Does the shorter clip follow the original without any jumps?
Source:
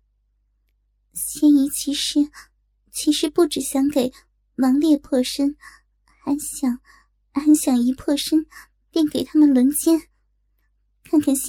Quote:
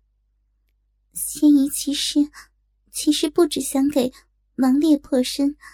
yes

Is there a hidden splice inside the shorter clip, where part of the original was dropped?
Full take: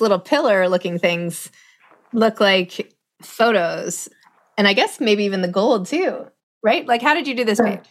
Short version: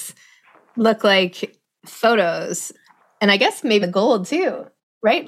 yes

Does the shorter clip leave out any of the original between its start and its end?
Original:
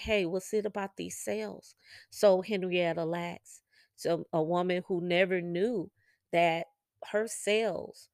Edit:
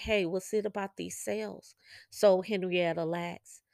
no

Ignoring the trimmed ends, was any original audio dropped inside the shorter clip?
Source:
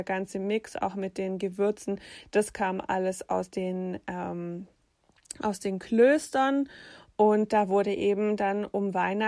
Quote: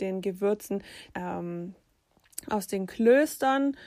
yes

